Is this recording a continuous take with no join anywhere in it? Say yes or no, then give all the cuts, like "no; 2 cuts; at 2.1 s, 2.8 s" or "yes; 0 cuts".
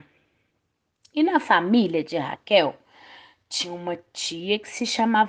yes; 0 cuts